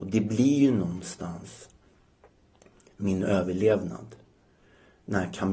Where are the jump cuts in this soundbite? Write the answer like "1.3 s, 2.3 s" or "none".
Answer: none